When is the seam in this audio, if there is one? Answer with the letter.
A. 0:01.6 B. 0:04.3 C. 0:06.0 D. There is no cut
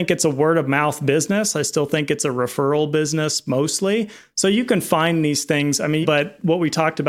C